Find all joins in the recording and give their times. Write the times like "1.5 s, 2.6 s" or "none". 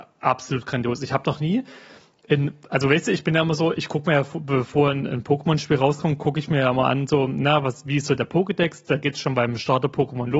none